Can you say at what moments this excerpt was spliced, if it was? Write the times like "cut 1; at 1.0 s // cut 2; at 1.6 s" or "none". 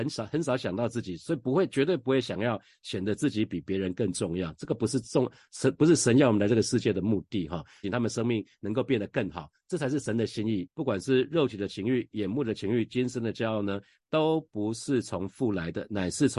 cut 1; at 7.8 s // cut 2; at 10.7 s